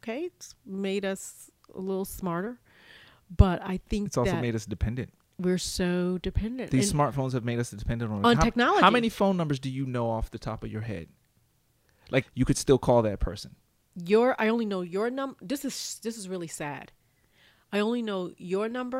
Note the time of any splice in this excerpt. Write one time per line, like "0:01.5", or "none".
0:12.2